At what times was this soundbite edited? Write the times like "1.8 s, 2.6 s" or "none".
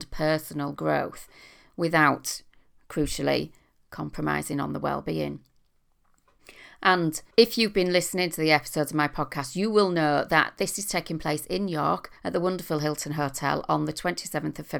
7.3 s, 12.2 s